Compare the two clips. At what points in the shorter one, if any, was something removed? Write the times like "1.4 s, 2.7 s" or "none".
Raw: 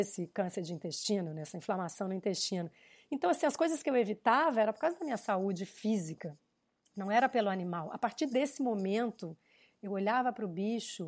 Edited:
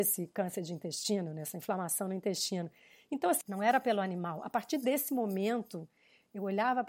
3.4 s